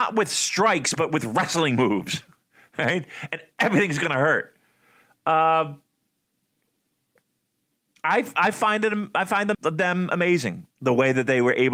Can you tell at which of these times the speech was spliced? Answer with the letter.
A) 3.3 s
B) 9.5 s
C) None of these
B